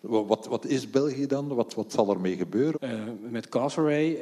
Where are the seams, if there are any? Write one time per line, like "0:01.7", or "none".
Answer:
0:02.7